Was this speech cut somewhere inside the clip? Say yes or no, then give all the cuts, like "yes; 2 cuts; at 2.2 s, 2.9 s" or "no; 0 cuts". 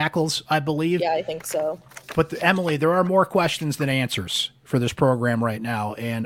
no; 0 cuts